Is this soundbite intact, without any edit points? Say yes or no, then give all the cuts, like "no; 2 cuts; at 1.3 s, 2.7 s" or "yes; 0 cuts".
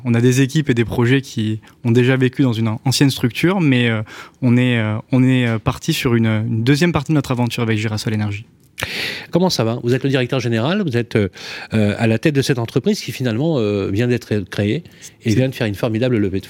no; 1 cut; at 9.3 s